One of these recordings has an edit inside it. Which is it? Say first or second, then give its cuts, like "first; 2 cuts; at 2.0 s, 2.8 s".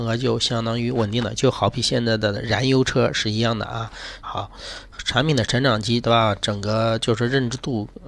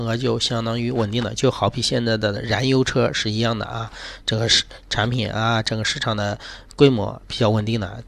first; 2 cuts; at 4.2 s, 6.0 s